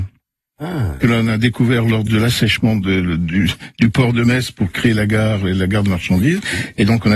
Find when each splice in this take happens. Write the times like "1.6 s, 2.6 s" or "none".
1.0 s